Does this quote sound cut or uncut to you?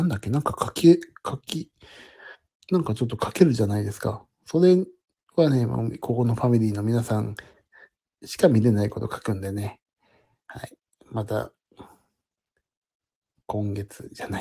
uncut